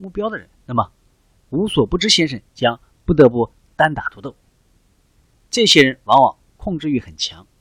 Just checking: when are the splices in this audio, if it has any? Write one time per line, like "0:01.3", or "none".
none